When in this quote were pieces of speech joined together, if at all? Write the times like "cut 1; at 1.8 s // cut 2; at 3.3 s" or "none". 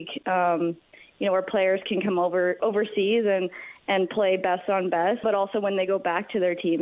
cut 1; at 2.6 s // cut 2; at 5.2 s